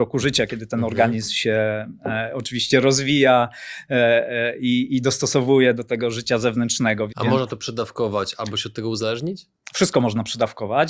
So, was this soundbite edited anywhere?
yes; 1 cut; at 7.1 s

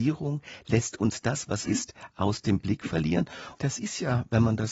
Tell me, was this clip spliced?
yes; 2 cuts; at 1.6 s, 3.5 s

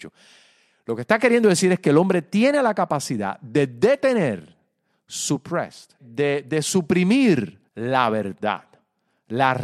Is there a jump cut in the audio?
yes; 2 cuts; at 6.0 s, 7.7 s

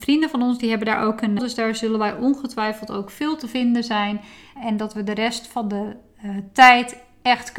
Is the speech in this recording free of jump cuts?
no; 2 cuts; at 1.4 s, 4.6 s

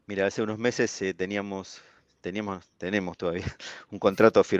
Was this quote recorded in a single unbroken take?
yes; 0 cuts

